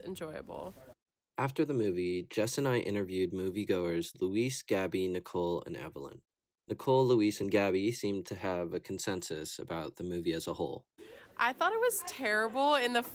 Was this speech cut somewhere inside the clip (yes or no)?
no